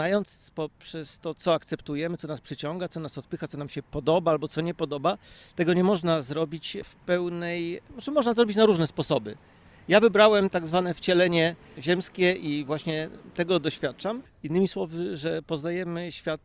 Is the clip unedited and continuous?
no; 1 cut; at 14.3 s

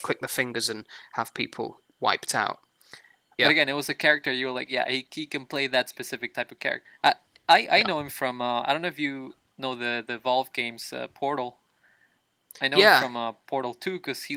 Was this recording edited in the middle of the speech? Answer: yes; 2 cuts; at 3.4 s, 6.8 s

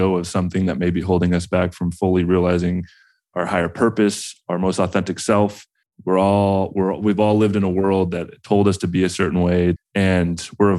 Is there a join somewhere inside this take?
yes; 2 cuts; at 5.8 s, 9.8 s

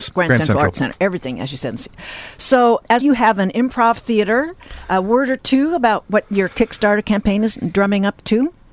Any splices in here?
yes; 1 cut; at 3.0 s

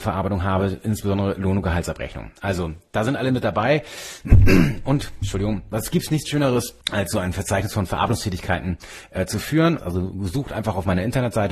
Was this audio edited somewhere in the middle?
yes; 2 cuts; at 6.8 s, 9.8 s

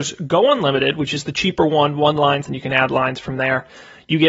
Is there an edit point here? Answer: yes; 1 cut; at 2.4 s

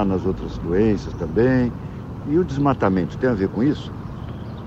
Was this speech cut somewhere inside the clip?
no; 0 cuts

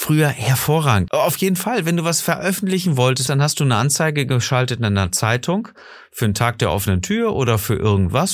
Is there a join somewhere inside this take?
yes; 2 cuts; at 1.1 s, 3.3 s

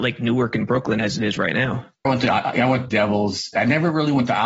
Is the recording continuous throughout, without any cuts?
no; 1 cut; at 2.1 s

